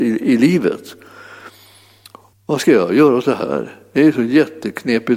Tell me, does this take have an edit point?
yes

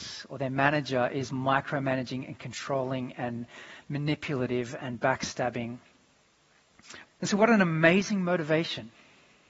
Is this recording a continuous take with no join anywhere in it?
no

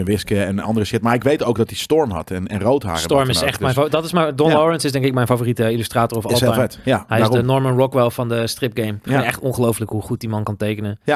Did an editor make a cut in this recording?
no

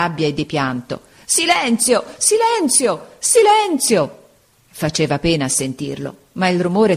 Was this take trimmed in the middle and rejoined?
no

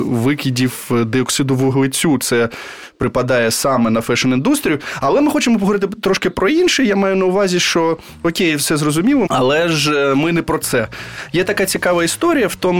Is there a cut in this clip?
yes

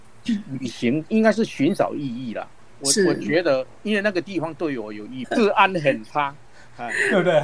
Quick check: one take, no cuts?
no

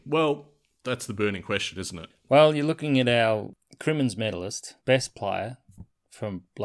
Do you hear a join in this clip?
yes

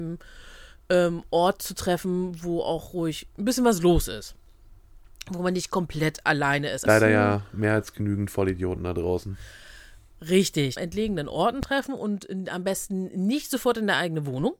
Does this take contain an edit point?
yes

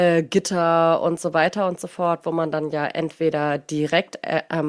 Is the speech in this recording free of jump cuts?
yes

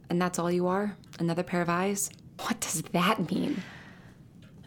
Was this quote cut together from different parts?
yes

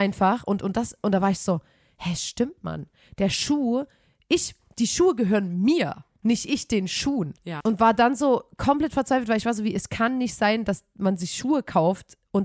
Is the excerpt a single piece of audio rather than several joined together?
no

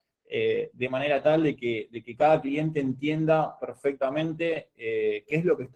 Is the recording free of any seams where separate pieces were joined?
yes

